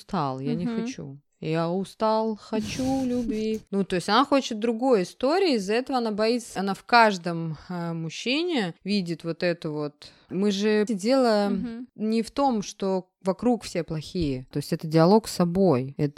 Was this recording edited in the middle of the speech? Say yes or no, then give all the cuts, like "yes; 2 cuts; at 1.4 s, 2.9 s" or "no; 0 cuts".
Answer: yes; 2 cuts; at 10.9 s, 14.5 s